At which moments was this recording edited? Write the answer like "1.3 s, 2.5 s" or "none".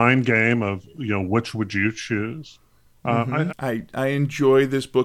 3.5 s